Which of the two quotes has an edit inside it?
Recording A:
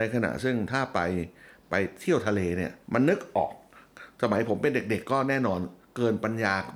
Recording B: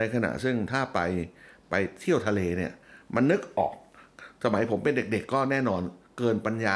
A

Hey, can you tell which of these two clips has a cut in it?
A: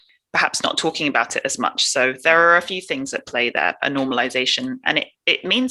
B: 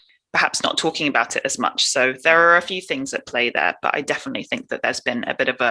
A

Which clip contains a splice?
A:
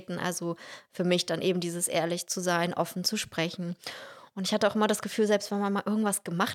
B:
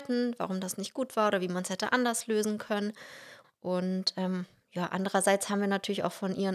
B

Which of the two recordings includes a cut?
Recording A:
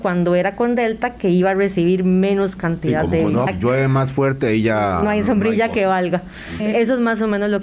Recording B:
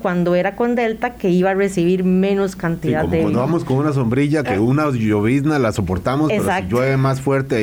A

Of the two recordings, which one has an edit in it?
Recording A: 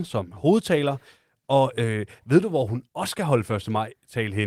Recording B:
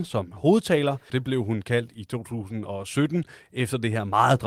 B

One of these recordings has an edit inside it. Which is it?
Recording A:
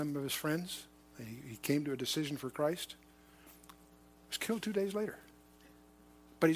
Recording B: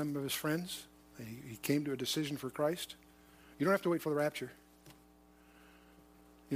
B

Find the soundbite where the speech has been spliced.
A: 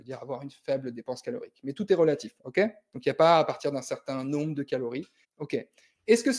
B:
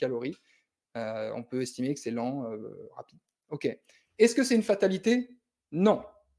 A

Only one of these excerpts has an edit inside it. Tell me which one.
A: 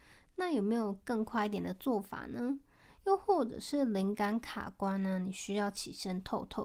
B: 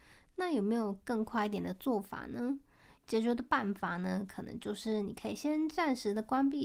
B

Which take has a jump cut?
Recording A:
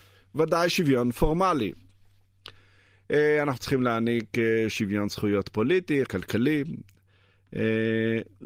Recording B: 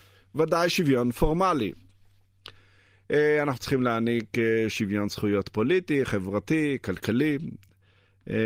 A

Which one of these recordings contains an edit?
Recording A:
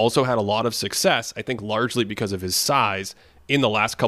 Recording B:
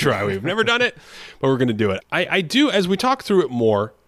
B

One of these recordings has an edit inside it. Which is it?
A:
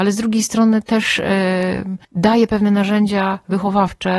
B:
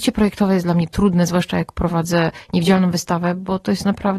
A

